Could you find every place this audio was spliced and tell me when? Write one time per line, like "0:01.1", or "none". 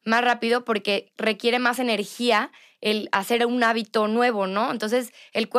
none